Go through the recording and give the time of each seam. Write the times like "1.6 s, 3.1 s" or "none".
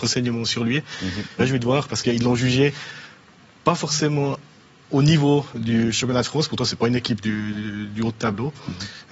1.4 s

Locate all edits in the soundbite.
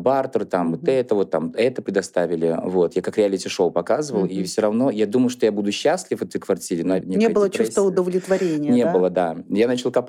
7.0 s

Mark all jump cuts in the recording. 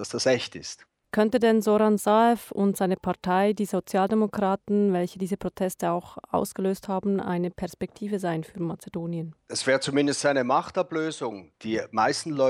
11.5 s

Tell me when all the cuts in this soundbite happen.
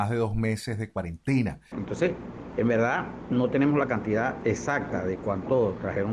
1.7 s

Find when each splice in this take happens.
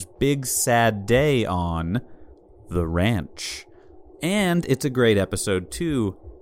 4.1 s

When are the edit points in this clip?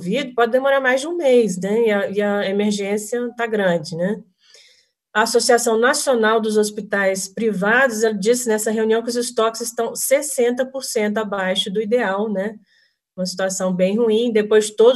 none

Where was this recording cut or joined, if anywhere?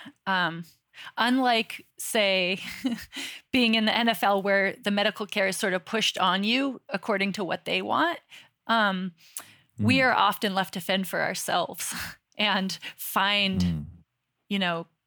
none

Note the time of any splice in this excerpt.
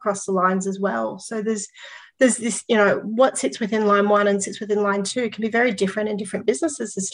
none

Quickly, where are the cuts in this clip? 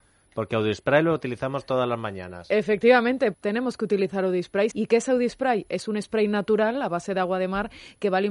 3.3 s, 4.7 s

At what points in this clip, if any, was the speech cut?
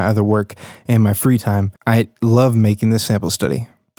1.8 s

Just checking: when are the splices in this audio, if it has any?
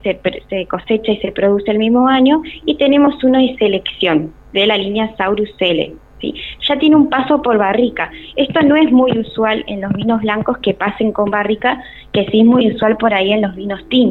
none

